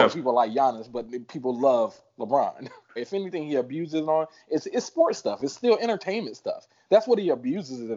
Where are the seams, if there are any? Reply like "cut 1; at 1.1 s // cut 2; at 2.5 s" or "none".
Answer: cut 1; at 3.0 s